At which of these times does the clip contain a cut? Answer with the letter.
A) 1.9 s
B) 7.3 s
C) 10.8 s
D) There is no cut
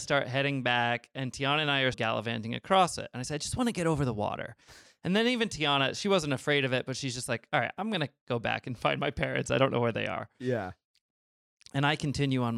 A